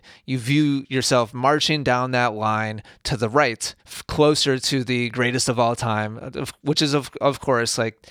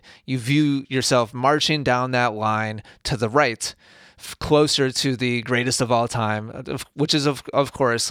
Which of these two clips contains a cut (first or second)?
first